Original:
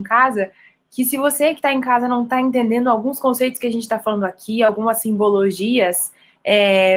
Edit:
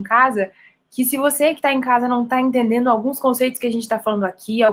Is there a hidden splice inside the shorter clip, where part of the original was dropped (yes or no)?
no